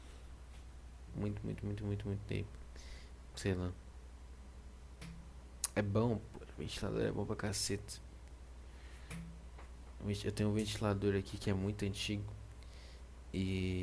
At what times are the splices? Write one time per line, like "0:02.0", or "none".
0:01.1
0:03.3